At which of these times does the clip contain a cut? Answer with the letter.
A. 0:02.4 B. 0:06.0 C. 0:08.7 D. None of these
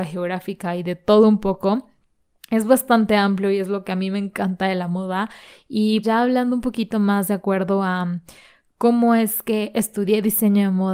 B